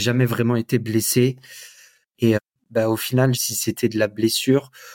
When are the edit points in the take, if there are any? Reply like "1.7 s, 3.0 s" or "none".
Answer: 2.0 s, 3.3 s